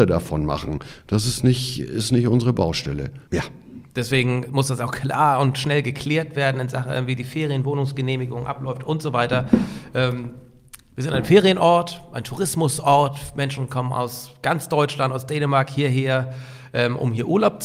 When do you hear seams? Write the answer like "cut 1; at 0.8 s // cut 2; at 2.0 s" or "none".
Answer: cut 1; at 3.3 s